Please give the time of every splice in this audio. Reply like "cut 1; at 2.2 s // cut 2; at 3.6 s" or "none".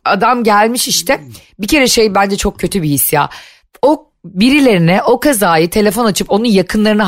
none